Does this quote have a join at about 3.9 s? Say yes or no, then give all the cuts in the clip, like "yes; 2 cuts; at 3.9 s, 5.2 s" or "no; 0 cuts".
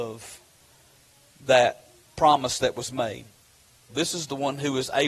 yes; 1 cut; at 3.9 s